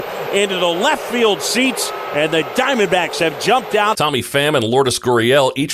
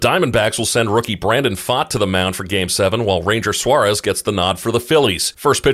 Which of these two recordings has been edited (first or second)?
first